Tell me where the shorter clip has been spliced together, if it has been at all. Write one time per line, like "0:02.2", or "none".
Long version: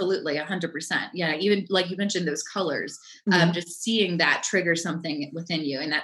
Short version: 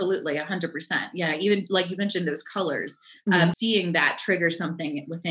0:03.5